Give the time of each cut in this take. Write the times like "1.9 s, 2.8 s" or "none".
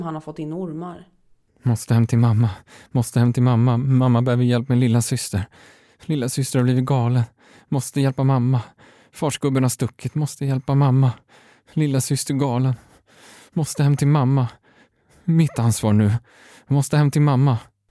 1.4 s